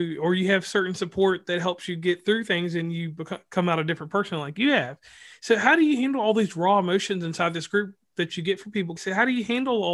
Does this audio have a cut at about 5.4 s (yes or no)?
no